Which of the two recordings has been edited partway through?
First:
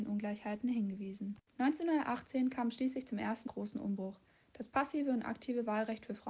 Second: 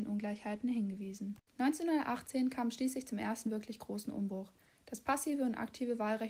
first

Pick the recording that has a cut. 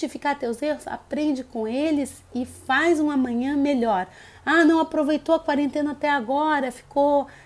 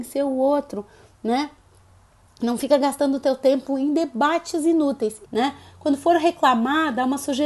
second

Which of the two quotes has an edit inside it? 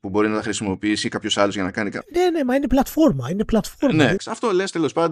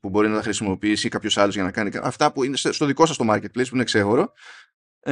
first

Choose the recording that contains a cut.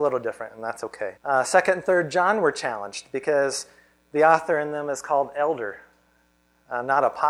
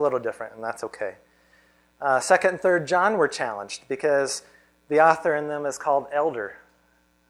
first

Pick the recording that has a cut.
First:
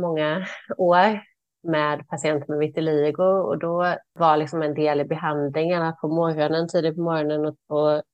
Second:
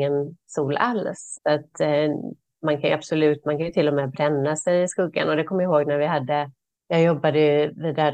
second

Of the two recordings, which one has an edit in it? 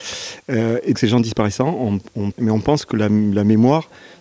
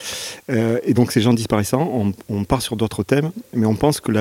first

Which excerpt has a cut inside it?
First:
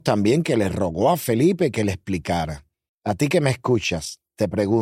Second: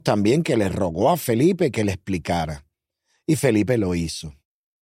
first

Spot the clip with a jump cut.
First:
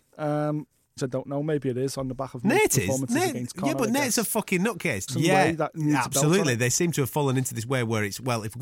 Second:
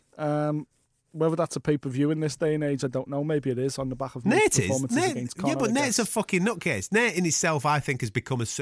first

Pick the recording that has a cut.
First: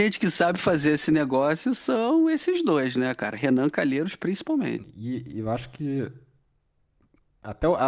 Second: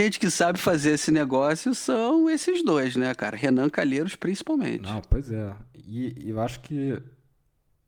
first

